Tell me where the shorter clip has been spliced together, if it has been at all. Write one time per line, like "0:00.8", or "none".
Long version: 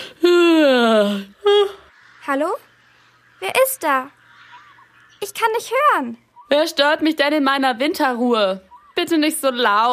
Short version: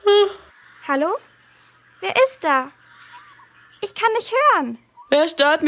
none

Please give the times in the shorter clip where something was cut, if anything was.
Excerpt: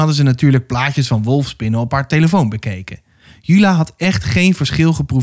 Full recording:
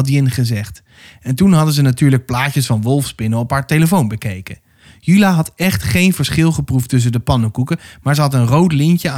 none

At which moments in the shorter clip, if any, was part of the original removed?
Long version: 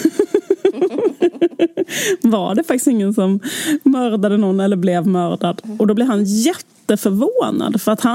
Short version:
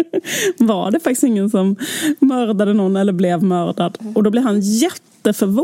none

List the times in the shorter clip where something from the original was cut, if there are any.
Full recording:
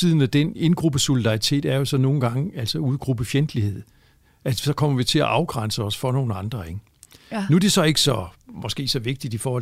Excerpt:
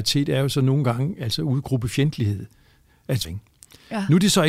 0:03.2

